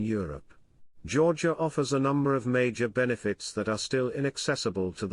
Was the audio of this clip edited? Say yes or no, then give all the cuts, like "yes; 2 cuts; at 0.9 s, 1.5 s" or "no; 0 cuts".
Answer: no; 0 cuts